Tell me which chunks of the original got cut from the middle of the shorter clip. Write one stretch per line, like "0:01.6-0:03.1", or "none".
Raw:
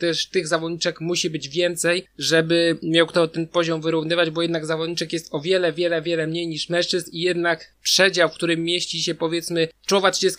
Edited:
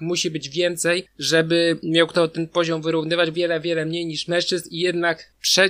0:04.3-0:05.7